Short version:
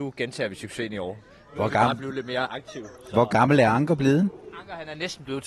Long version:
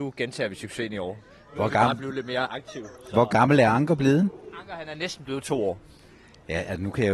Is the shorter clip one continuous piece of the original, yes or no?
yes